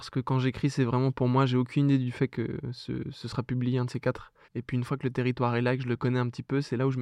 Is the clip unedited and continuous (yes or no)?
no